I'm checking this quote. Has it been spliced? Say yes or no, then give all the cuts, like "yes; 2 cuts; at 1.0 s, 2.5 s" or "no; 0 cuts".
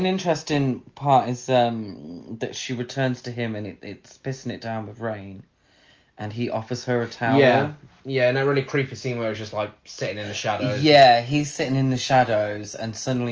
no; 0 cuts